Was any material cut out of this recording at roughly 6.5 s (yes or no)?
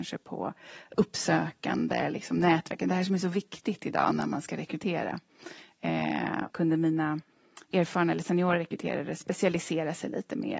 yes